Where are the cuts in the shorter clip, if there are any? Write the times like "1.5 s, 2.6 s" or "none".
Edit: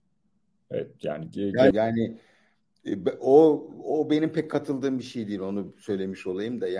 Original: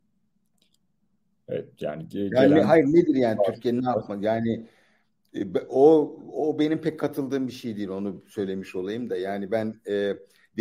1.7 s